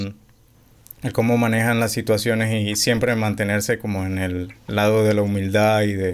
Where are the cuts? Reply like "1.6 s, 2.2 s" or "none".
none